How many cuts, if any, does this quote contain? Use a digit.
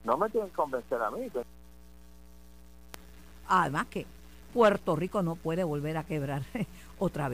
1